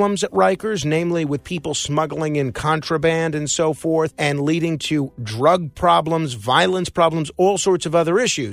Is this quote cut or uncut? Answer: uncut